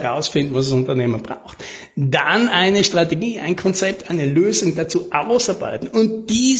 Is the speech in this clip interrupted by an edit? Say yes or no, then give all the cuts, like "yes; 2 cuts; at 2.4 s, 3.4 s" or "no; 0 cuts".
no; 0 cuts